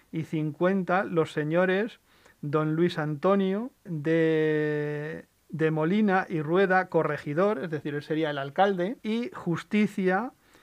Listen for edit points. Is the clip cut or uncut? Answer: cut